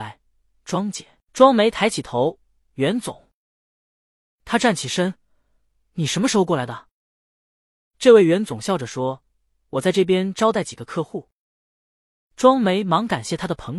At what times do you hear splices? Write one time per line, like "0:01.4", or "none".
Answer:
none